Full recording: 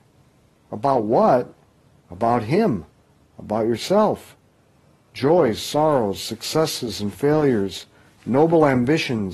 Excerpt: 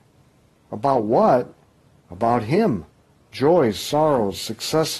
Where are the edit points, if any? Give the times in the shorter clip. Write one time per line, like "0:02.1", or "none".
0:03.2

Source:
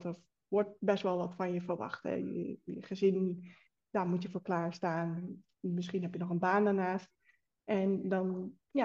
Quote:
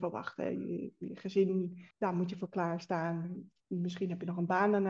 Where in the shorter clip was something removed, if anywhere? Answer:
0:01.9

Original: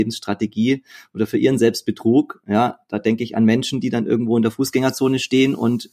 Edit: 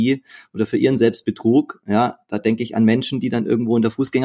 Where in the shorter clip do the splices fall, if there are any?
none

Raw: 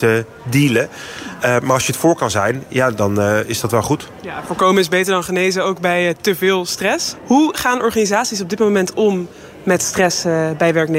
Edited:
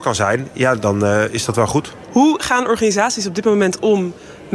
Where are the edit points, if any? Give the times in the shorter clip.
0:02.1

